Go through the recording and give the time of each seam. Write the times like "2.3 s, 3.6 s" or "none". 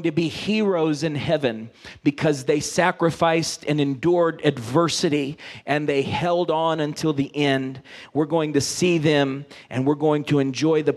none